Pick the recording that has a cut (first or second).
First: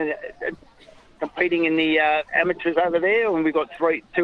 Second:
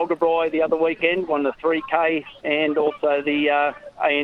second